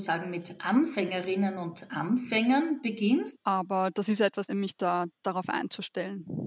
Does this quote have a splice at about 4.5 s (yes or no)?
yes